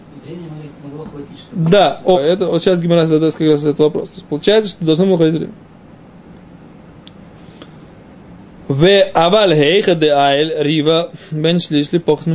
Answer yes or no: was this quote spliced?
yes